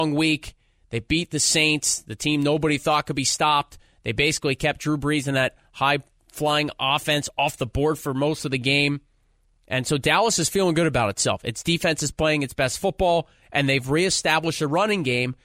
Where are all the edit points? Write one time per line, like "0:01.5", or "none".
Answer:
none